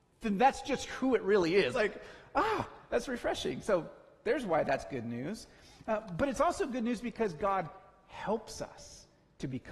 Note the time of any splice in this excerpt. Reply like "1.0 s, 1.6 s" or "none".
1.7 s